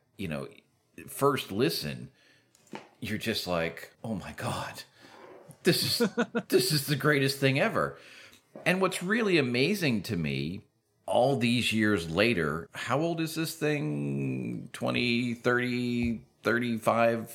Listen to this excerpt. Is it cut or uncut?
cut